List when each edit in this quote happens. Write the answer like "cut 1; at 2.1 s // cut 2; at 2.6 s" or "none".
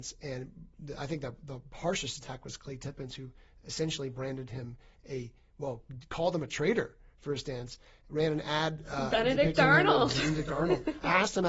none